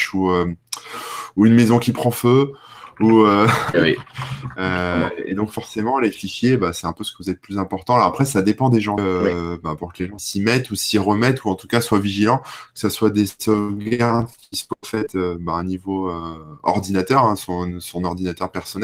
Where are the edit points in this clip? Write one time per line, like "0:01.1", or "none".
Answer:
0:03.7
0:09.0
0:10.2

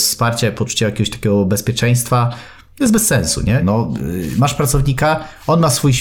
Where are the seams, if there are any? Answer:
0:03.6

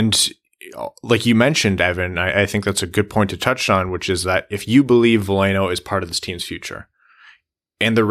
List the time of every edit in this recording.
none

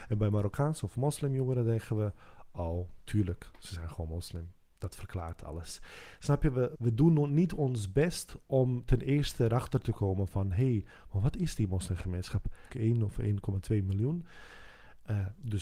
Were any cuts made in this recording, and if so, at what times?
0:06.7
0:12.7

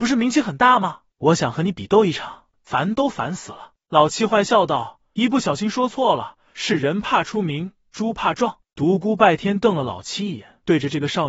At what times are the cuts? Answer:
0:02.5
0:08.6

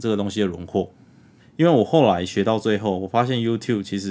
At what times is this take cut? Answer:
0:01.4

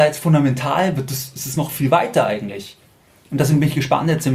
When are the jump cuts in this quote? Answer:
none

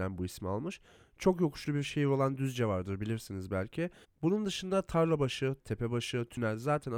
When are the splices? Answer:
0:04.0
0:05.6

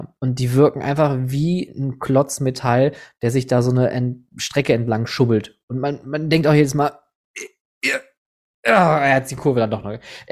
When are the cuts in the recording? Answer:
none

